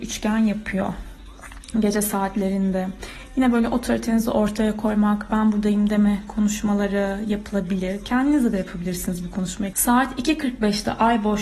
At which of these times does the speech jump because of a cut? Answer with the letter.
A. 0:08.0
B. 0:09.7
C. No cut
B